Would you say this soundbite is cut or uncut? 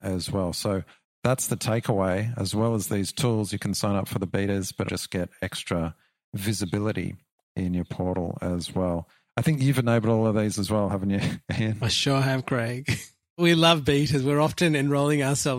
cut